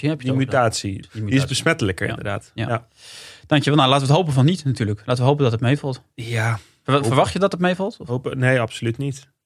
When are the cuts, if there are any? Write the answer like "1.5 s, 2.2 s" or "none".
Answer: 1.0 s